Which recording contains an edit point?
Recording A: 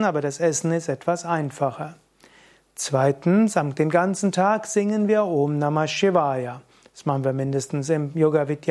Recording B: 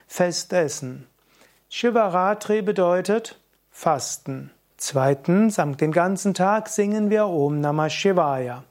B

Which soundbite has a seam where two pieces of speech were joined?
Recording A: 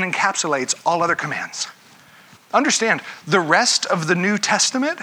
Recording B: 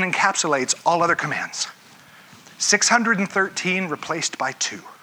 A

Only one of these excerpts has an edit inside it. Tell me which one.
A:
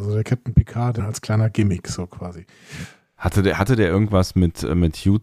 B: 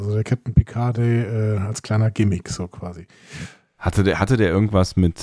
A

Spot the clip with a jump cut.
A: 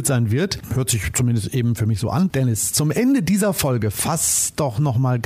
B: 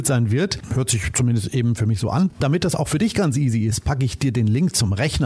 A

